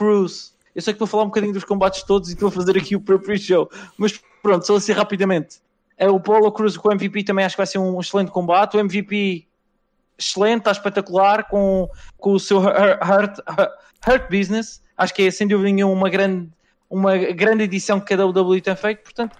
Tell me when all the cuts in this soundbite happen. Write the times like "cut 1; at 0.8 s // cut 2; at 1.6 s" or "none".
cut 1; at 12.2 s